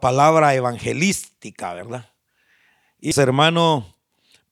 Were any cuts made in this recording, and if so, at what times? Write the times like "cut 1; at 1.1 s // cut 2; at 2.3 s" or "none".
cut 1; at 3.1 s